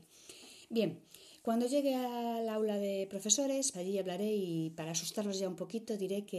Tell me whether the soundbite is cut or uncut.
cut